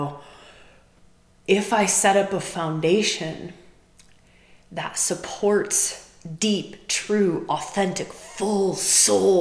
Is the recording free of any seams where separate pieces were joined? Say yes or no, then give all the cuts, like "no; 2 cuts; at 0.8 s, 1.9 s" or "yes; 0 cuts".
yes; 0 cuts